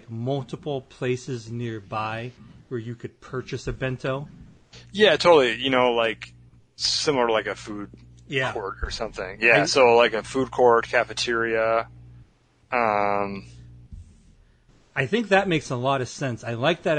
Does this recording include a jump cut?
no; 0 cuts

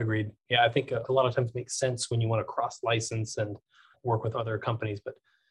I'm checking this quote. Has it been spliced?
yes; 2 cuts; at 1.0 s, 4.3 s

